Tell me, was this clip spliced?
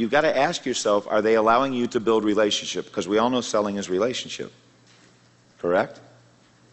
no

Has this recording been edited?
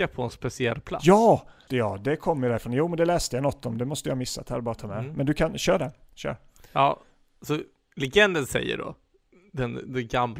yes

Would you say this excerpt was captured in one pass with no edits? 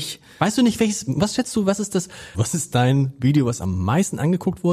no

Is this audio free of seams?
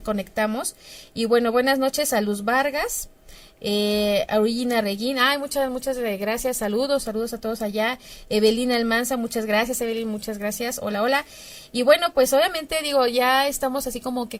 yes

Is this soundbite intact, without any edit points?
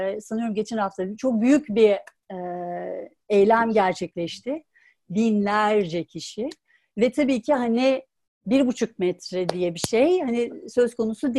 no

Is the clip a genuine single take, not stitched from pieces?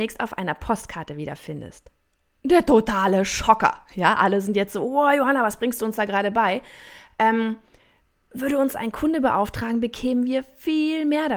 yes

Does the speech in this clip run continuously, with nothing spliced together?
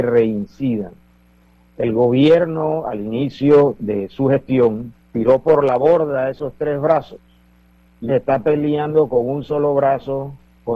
no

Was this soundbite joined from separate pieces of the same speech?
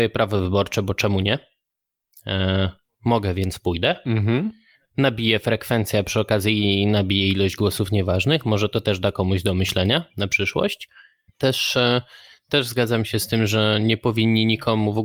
yes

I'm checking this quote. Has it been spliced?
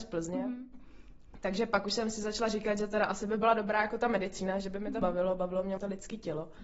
no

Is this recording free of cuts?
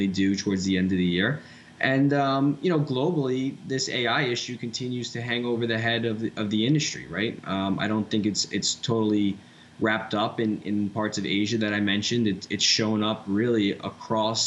yes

